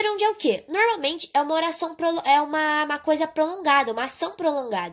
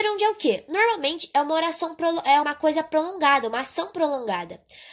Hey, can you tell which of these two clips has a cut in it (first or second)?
second